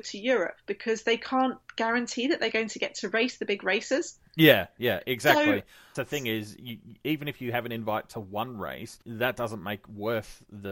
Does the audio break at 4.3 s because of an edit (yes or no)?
no